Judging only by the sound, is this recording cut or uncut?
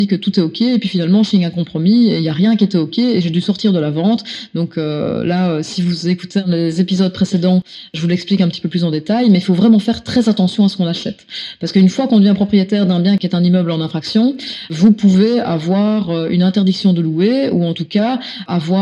uncut